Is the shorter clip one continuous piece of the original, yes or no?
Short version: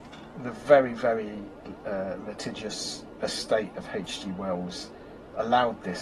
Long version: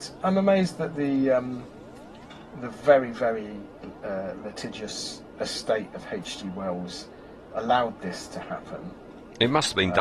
yes